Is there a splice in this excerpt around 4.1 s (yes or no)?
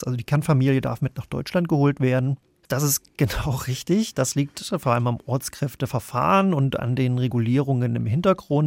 no